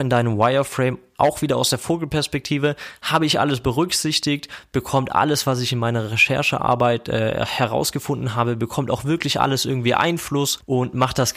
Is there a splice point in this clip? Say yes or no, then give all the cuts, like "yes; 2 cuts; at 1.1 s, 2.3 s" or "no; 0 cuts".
no; 0 cuts